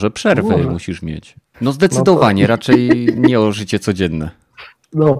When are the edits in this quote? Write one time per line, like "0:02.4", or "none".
0:01.5